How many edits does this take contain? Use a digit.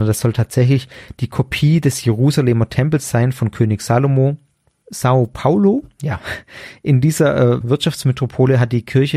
2